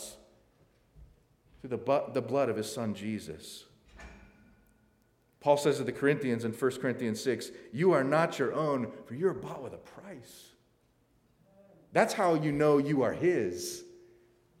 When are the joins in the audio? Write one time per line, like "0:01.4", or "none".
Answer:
none